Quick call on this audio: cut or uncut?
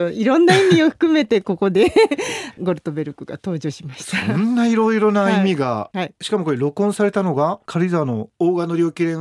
uncut